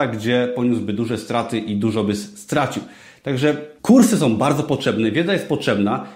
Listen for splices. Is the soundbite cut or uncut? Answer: cut